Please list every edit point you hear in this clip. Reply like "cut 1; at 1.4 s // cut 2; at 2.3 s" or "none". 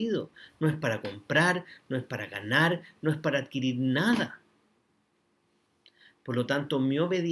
none